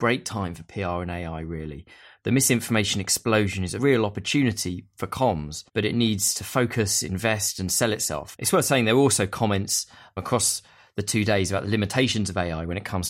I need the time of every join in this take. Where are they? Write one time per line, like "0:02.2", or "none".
0:05.7
0:08.3